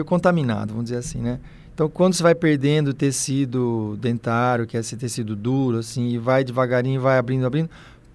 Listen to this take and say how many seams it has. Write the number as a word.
zero